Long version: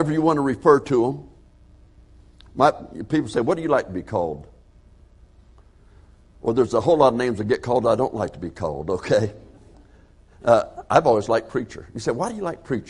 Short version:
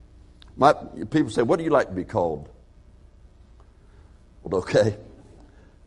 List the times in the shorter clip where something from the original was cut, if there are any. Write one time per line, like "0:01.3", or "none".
0:04.5